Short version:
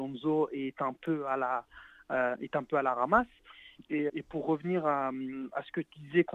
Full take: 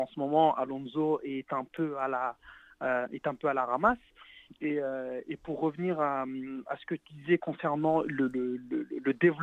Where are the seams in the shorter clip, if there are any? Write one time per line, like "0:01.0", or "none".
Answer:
0:04.1